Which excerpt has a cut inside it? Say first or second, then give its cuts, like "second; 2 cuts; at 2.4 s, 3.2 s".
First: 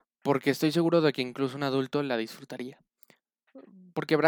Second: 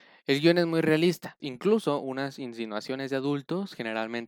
second; 1 cut; at 1.4 s